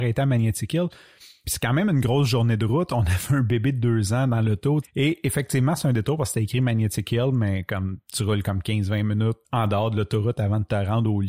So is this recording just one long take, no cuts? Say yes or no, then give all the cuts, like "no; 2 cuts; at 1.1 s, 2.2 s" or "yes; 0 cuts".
no; 2 cuts; at 4.8 s, 9.4 s